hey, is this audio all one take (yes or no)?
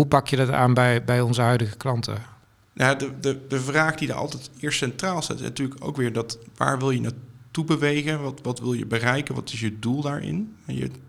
yes